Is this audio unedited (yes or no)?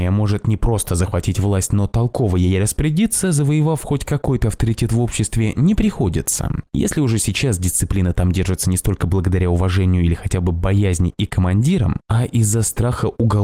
yes